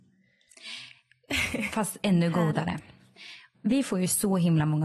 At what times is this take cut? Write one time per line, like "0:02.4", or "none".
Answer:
0:03.5